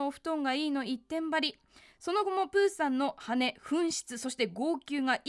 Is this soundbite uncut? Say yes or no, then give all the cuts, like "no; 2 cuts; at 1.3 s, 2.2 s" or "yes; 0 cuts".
yes; 0 cuts